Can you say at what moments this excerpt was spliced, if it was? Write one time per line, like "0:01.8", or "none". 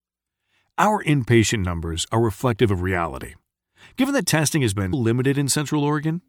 0:03.8
0:04.9